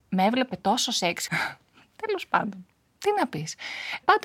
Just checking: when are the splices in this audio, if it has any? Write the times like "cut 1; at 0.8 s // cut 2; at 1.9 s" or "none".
cut 1; at 1.3 s

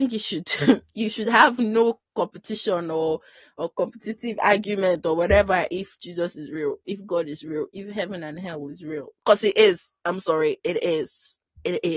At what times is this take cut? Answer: none

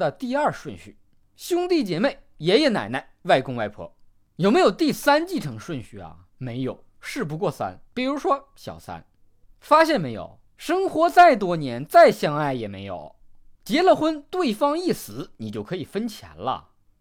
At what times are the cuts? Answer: cut 1; at 7.9 s // cut 2; at 10.5 s // cut 3; at 13.5 s

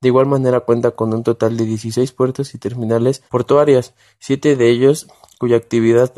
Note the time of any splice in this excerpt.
cut 1; at 3.3 s

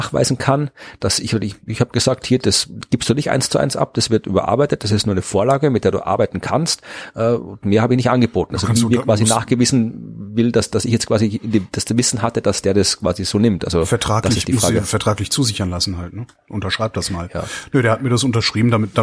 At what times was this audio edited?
cut 1; at 1.7 s

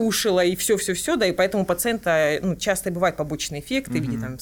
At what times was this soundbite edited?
none

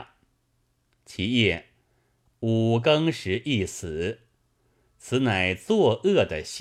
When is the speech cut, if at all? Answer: cut 1; at 2.3 s

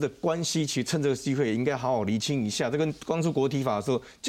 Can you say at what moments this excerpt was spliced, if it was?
none

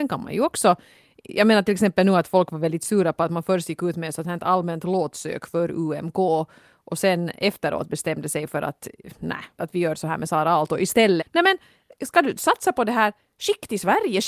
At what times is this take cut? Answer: cut 1; at 9.6 s // cut 2; at 11.2 s

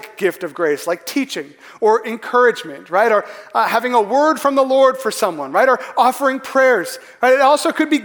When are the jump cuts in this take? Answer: none

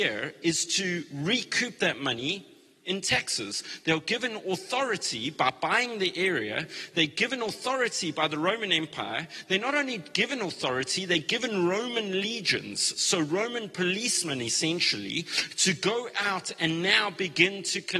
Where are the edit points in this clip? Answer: none

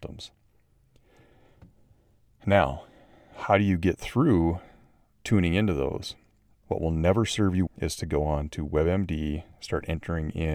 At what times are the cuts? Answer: cut 1; at 6.6 s // cut 2; at 7.7 s

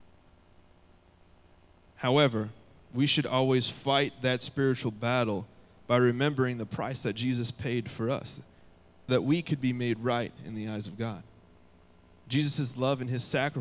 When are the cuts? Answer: cut 1; at 9.1 s

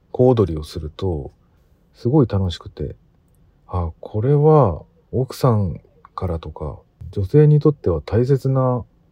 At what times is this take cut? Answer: cut 1; at 5.1 s

